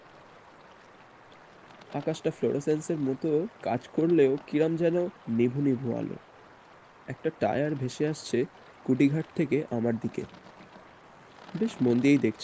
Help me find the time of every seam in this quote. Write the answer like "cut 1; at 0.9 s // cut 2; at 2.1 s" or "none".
none